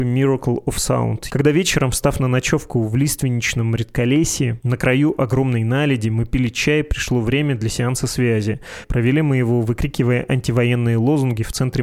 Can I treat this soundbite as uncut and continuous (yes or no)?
no